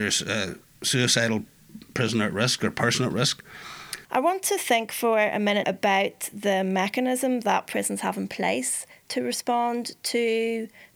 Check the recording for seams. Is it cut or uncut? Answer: cut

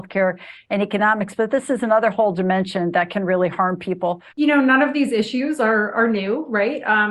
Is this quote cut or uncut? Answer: cut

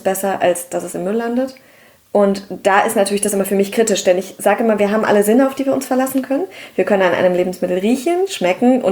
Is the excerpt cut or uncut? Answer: uncut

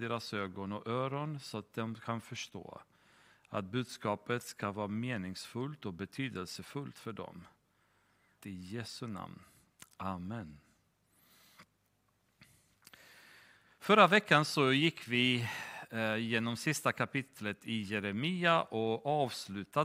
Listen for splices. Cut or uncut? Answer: cut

